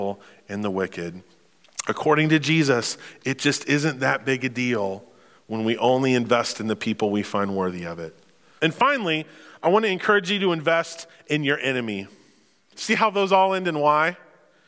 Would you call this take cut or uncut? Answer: cut